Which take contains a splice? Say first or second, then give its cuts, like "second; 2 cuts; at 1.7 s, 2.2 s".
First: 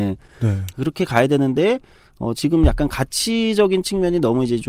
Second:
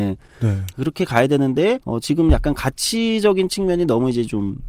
second; 1 cut; at 1.8 s